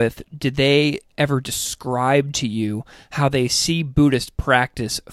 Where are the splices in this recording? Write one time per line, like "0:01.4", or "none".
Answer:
none